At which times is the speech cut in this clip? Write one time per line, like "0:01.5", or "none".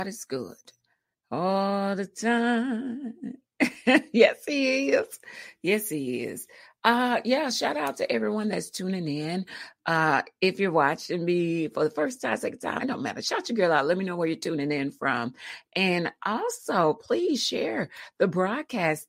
0:12.8